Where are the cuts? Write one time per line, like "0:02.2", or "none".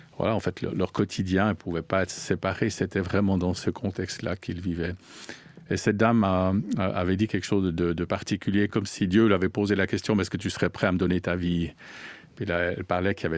none